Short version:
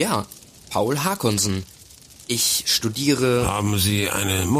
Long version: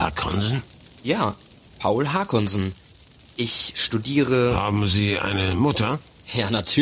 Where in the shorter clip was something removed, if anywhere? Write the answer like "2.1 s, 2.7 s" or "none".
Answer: none